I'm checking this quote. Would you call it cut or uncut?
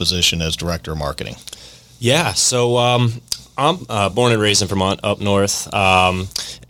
uncut